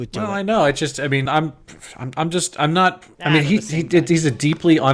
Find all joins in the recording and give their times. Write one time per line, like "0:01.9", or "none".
0:01.3
0:03.1